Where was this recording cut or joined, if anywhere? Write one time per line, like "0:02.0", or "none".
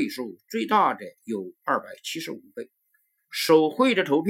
0:03.2